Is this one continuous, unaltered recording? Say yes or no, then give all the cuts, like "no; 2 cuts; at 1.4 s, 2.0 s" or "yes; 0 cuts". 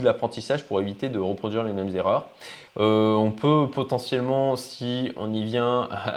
no; 1 cut; at 2.7 s